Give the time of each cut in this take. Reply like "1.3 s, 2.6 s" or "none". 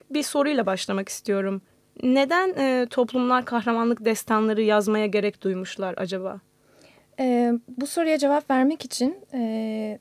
none